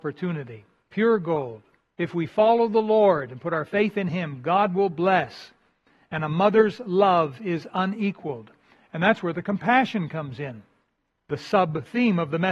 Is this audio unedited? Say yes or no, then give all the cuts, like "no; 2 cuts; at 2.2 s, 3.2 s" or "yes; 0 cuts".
no; 1 cut; at 1.9 s